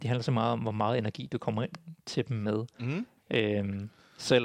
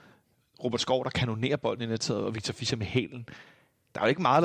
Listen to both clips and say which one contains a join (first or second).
first